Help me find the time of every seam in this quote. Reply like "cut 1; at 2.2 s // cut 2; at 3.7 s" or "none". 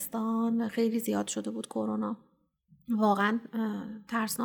none